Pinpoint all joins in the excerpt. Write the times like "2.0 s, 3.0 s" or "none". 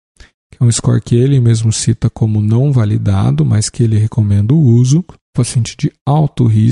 5.1 s